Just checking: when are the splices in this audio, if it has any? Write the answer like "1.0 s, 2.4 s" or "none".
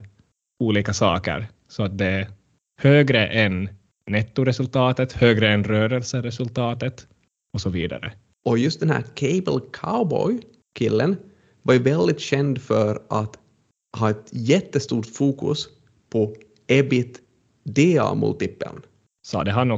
8.4 s